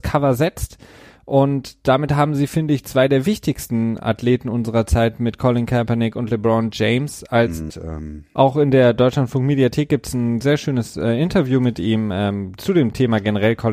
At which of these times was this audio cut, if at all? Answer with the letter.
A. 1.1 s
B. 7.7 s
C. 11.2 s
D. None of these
B